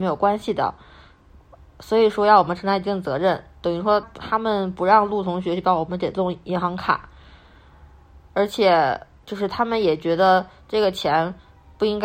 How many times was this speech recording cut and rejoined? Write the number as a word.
one